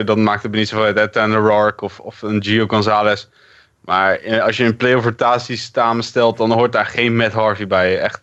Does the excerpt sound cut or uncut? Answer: uncut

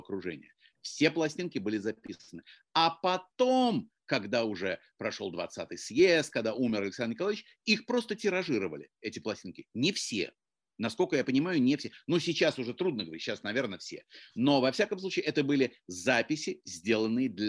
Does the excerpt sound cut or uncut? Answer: uncut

